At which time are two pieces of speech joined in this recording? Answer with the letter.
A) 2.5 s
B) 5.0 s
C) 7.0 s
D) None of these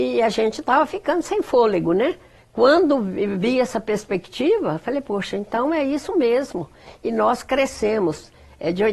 D